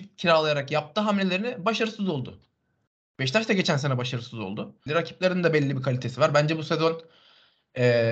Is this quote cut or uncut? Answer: cut